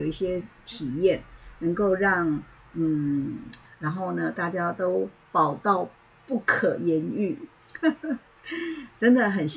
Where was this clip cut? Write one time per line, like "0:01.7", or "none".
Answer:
0:03.6

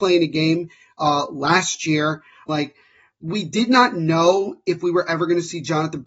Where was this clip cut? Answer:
0:02.5

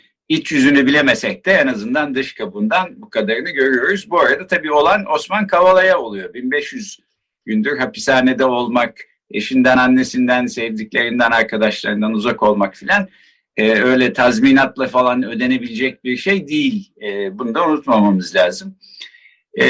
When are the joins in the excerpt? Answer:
none

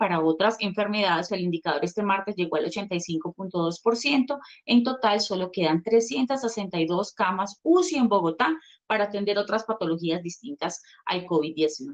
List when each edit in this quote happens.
0:01.3

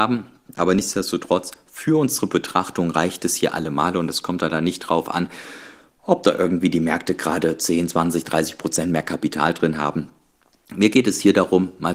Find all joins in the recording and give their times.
none

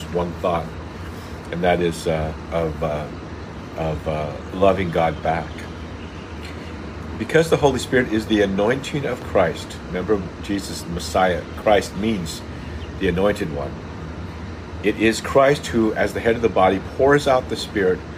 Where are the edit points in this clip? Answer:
0:02.5

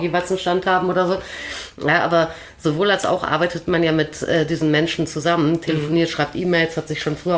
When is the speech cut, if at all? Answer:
none

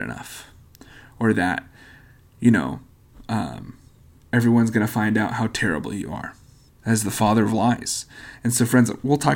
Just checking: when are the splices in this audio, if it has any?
0:06.7

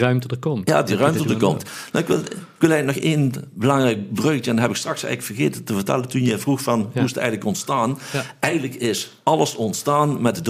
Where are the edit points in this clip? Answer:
none

